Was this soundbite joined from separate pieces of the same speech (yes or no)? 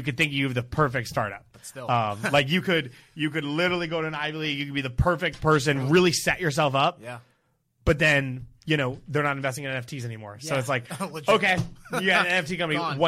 no